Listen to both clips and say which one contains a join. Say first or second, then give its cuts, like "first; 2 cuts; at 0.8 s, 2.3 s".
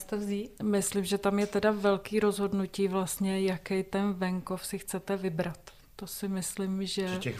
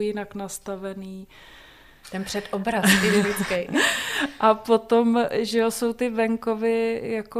second; 1 cut; at 2.0 s